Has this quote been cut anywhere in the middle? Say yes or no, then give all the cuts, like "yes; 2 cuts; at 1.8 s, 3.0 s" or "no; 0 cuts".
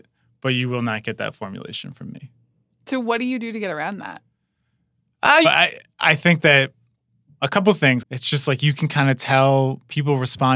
yes; 2 cuts; at 5.4 s, 8.0 s